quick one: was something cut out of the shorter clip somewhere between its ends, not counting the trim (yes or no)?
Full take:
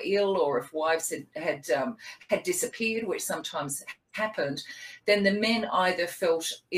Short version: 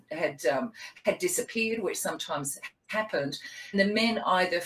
yes